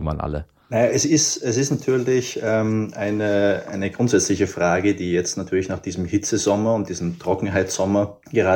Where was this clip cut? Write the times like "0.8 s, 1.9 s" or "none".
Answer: none